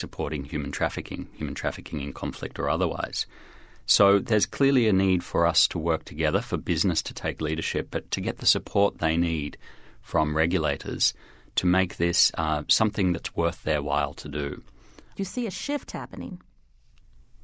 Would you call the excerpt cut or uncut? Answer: cut